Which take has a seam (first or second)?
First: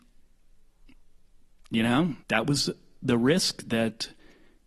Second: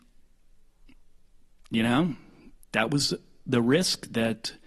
first